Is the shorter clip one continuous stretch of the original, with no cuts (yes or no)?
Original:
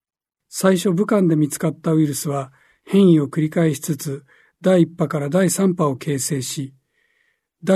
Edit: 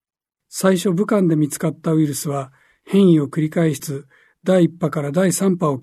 no